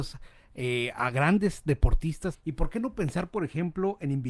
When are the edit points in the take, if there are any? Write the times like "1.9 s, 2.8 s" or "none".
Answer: 2.3 s